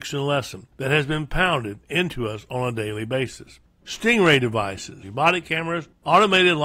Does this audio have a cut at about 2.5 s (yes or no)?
no